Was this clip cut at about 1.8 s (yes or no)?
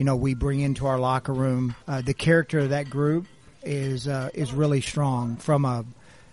yes